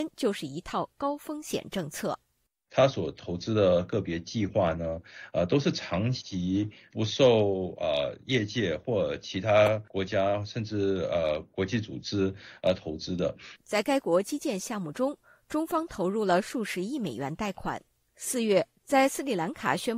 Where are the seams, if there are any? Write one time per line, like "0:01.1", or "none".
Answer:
0:13.6